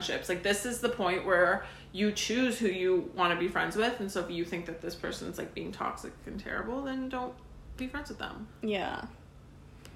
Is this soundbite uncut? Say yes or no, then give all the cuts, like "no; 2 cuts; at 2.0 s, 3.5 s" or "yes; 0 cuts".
no; 1 cut; at 8.5 s